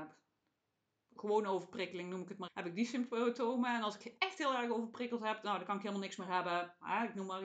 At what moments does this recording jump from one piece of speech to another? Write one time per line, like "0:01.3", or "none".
0:02.5